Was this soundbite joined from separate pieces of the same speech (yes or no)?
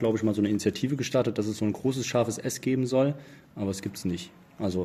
no